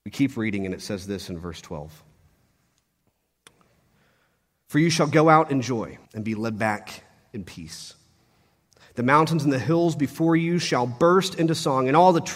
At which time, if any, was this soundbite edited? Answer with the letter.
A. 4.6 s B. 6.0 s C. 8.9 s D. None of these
B